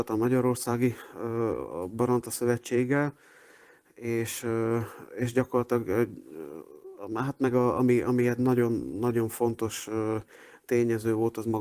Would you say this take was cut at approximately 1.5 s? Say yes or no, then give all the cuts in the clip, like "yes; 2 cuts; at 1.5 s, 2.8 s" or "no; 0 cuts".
no; 0 cuts